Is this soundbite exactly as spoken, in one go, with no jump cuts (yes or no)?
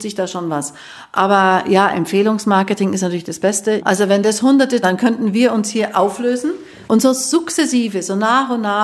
no